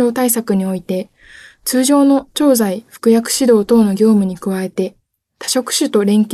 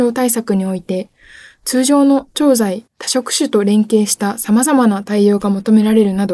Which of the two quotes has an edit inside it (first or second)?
second